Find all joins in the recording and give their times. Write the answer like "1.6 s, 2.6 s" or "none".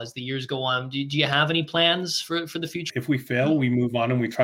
2.9 s